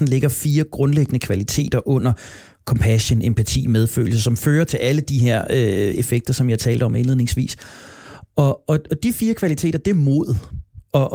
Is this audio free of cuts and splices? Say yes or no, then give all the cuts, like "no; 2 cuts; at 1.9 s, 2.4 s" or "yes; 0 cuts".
yes; 0 cuts